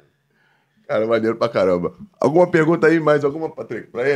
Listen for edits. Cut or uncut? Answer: uncut